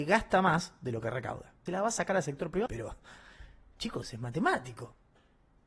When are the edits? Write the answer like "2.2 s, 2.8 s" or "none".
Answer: 1.7 s, 2.7 s